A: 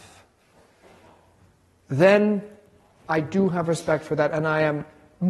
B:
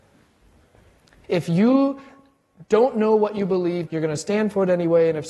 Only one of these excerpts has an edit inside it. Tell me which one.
B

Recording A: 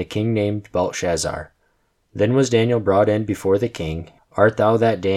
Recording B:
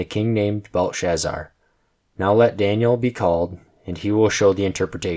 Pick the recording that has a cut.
A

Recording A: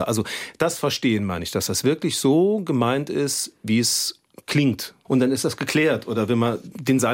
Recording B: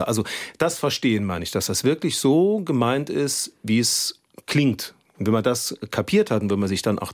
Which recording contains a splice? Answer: A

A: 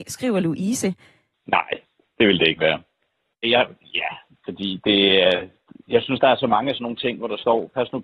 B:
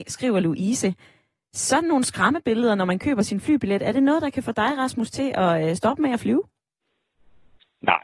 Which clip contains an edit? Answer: A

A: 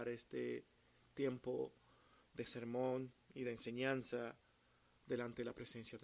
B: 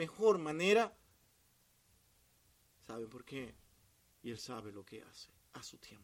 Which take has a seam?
B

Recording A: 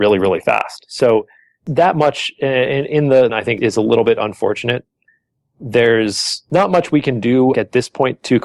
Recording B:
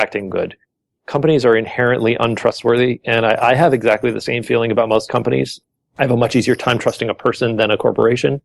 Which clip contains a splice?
A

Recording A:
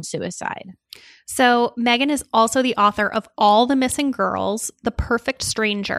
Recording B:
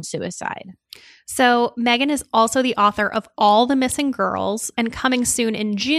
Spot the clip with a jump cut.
B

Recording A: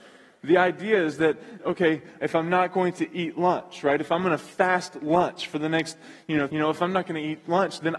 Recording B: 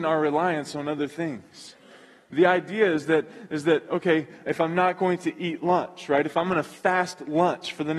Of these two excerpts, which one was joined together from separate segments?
A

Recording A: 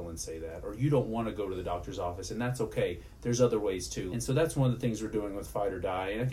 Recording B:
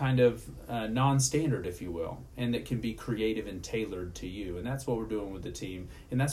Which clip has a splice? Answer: A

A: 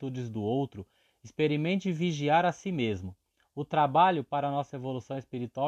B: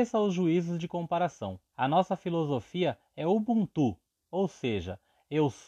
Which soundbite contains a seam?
B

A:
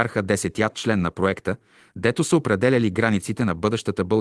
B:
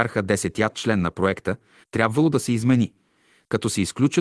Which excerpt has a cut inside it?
B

